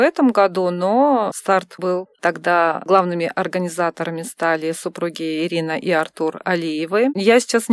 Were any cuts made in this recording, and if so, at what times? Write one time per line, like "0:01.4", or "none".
0:02.1